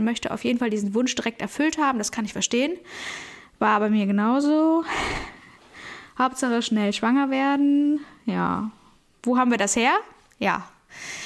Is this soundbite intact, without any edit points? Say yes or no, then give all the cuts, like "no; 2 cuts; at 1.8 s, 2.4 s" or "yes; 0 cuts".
yes; 0 cuts